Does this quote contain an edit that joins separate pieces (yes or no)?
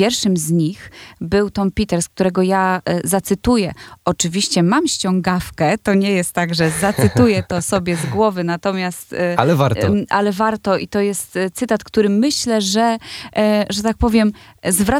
no